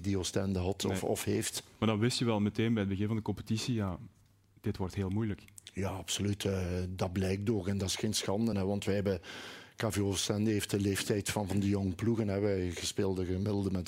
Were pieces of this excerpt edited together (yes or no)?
no